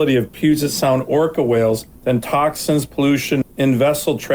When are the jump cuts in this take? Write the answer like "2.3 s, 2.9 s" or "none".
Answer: 2.0 s, 3.4 s